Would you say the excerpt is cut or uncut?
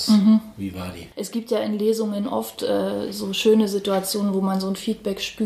uncut